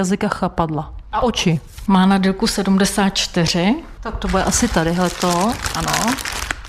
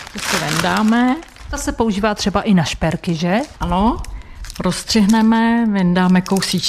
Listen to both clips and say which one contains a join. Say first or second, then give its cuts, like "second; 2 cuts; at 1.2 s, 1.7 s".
first; 2 cuts; at 1.9 s, 4.0 s